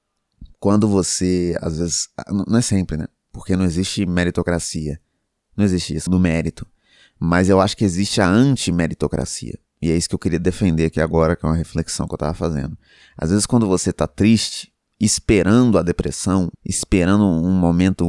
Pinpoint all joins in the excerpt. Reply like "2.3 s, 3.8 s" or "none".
6.1 s, 16.6 s